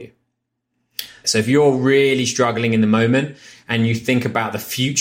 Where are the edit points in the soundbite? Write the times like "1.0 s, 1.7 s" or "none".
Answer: 1.2 s